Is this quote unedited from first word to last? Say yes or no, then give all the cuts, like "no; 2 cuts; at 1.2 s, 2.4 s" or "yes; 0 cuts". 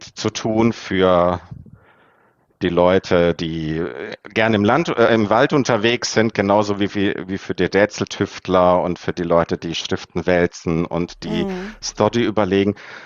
yes; 0 cuts